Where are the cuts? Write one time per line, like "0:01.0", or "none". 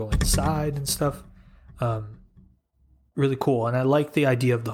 0:03.1